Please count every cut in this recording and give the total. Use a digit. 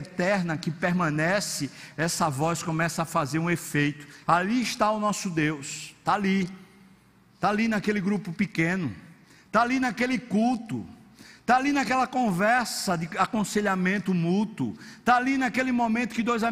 1